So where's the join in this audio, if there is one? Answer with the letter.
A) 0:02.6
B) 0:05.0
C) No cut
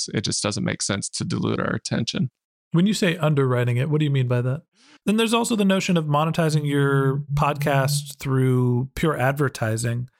B